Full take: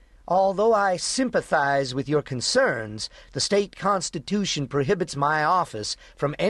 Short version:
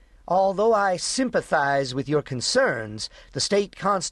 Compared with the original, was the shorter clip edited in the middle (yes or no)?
no